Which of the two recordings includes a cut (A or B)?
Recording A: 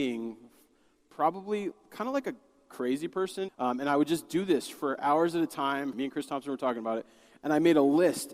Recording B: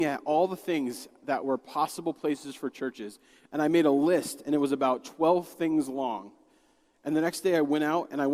A